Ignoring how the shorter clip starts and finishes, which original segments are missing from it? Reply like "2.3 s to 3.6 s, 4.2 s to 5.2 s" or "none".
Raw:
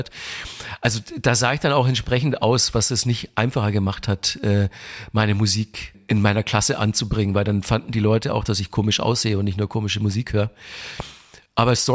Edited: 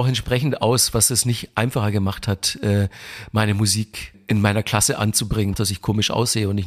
7.3 s to 8.4 s